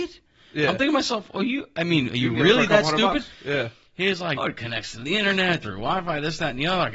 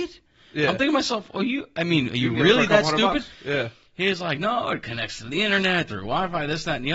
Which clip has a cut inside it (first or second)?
first